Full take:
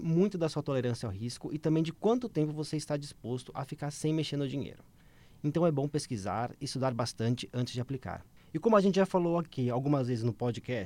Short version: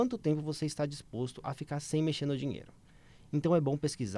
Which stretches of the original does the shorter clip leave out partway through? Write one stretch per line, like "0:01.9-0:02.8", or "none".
none